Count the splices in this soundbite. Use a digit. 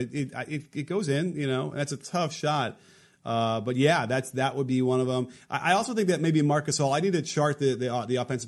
0